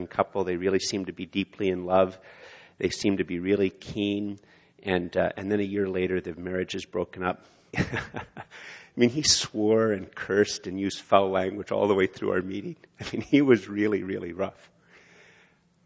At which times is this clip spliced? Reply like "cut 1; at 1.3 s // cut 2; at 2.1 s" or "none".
cut 1; at 7.7 s